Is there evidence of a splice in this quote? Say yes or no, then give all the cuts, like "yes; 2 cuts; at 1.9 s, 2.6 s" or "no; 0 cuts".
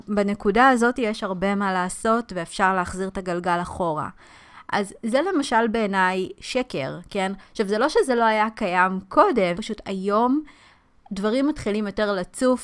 yes; 1 cut; at 9.5 s